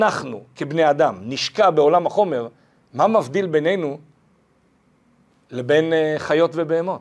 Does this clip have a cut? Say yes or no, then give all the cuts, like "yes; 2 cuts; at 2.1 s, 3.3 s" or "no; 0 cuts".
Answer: no; 0 cuts